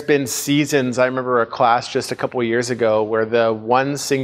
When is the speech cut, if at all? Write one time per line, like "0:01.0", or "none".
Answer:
none